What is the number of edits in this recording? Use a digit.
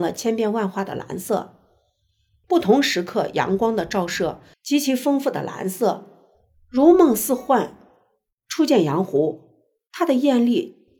2